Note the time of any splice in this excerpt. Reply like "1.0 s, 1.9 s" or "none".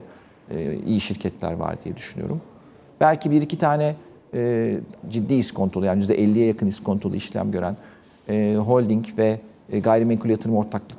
5.0 s